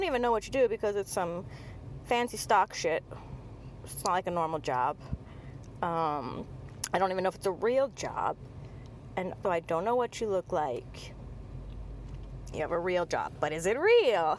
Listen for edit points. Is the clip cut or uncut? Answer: cut